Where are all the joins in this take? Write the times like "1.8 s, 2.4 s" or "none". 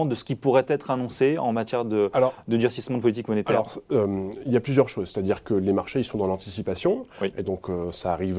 none